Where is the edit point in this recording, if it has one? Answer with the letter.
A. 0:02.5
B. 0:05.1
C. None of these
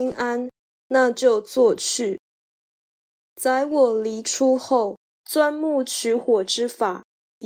B